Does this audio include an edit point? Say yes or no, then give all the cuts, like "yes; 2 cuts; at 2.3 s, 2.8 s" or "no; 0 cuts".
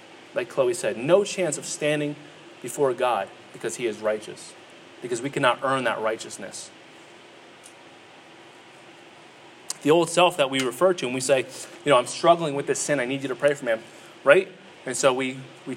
yes; 1 cut; at 14.7 s